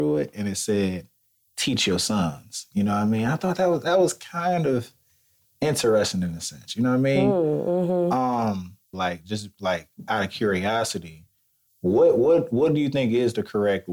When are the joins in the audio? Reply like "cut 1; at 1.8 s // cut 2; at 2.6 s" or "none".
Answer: cut 1; at 8.9 s // cut 2; at 11.7 s

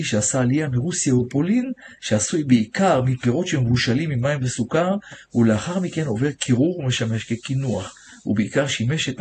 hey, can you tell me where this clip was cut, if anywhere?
none

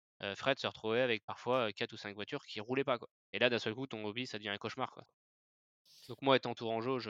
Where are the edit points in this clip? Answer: cut 1; at 3.2 s // cut 2; at 5.0 s

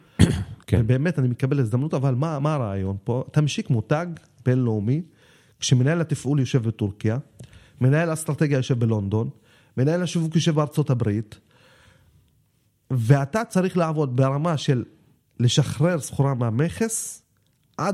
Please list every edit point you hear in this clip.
none

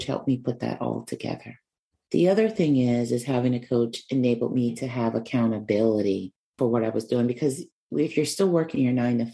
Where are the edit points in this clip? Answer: none

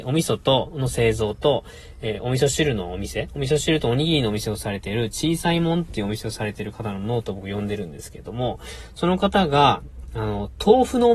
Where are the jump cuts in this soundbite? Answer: none

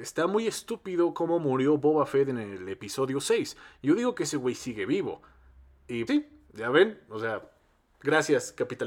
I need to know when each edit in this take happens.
cut 1; at 6.1 s

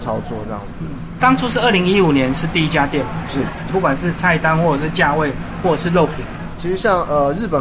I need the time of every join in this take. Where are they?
cut 1; at 1.2 s // cut 2; at 3.7 s // cut 3; at 6.6 s

